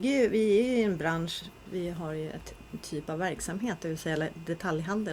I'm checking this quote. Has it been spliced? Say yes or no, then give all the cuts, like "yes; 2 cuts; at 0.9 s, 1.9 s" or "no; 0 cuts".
yes; 1 cut; at 1.6 s